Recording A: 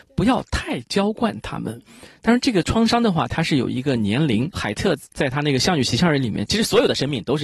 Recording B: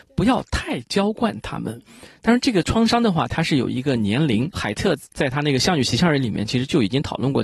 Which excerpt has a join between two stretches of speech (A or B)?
A